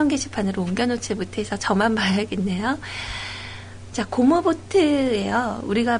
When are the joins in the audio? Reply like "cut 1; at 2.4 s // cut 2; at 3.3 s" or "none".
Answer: cut 1; at 3.9 s